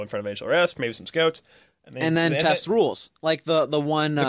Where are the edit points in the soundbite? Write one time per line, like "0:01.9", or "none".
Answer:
none